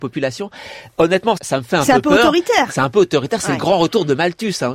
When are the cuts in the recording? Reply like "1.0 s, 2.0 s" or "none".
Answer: 1.4 s